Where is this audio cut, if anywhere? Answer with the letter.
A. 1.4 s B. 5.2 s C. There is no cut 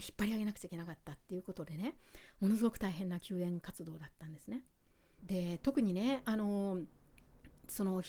B